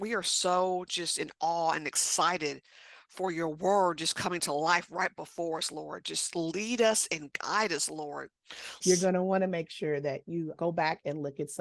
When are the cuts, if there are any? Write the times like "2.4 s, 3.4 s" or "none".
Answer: 8.8 s, 10.5 s